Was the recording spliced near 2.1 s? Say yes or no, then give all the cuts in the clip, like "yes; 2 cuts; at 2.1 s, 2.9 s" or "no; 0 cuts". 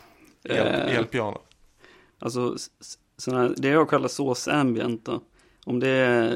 yes; 1 cut; at 2.1 s